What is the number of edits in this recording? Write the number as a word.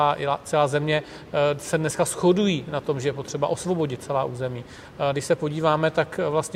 one